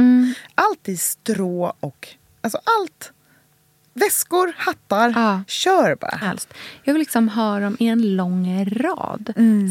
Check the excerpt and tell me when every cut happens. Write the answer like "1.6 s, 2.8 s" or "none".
6.2 s